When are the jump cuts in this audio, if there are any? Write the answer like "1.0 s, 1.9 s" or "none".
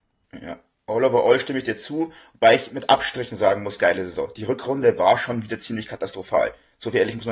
none